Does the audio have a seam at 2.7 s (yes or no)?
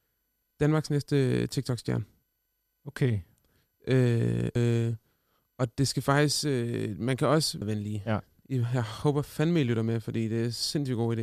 no